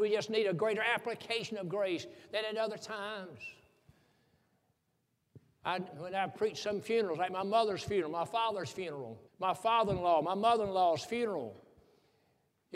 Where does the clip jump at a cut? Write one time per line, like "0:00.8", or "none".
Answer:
0:05.9
0:09.3